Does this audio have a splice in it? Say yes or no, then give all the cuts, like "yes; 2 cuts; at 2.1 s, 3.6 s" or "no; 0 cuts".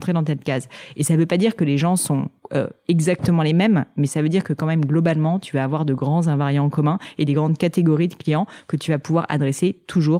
no; 0 cuts